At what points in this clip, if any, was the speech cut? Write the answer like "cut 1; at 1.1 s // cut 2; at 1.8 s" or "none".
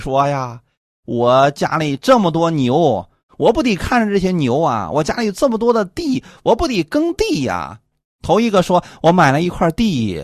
cut 1; at 7.9 s